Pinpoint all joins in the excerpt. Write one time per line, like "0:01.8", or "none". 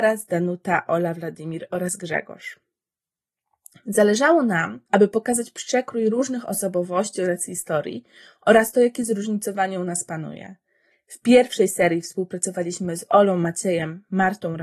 0:04.9
0:10.9